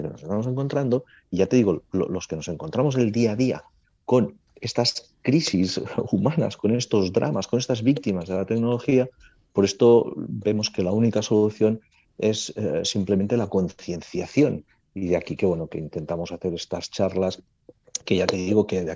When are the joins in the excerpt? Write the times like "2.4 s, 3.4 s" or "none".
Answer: none